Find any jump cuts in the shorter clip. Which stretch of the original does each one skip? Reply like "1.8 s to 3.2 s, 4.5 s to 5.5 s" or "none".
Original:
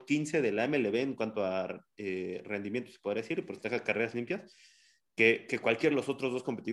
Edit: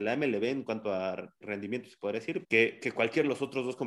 1.9 s to 2.4 s, 3.5 s to 5.1 s